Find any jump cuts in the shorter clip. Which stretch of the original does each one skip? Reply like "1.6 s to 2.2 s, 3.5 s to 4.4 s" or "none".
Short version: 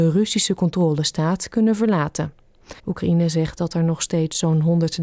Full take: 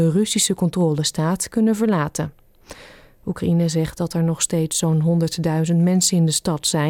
2.8 s to 3.2 s

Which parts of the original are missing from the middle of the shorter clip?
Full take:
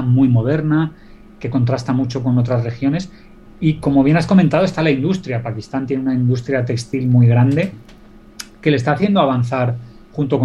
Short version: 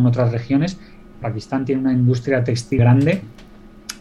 3.5 s to 5.4 s, 7.0 s to 7.3 s

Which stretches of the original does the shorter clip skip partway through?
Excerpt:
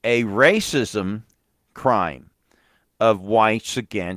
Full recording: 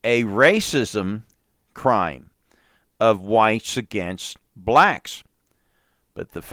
none

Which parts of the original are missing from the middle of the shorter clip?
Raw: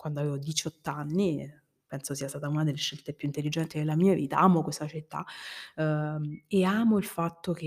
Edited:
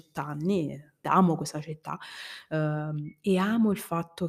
1.7 s to 4.3 s

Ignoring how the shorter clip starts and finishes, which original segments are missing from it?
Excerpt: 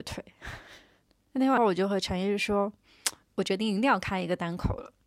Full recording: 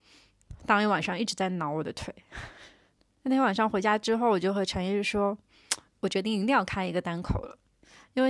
3.5 s to 4.2 s

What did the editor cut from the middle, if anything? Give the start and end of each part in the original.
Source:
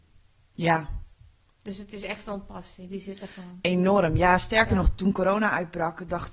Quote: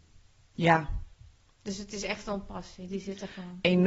none

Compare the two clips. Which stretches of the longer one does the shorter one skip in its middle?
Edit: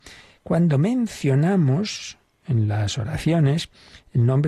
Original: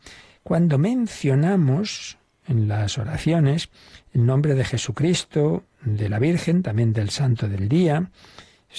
none

